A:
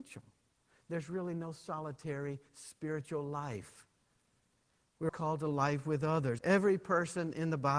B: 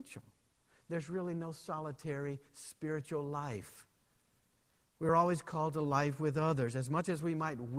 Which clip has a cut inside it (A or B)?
A